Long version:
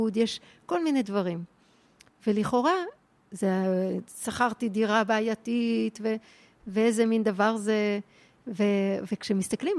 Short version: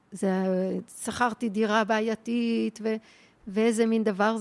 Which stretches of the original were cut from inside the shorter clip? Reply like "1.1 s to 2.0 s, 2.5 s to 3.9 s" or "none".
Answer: none